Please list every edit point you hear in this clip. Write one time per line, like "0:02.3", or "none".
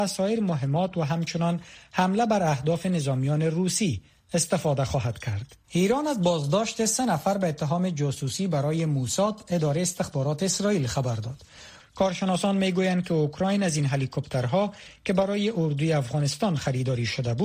0:05.6
0:11.8